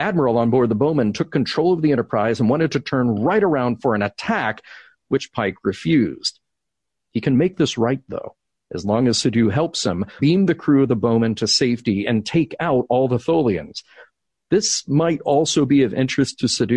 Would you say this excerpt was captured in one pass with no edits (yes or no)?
no